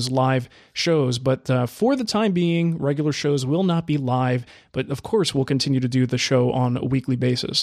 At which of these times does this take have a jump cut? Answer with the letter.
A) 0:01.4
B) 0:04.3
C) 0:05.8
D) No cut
D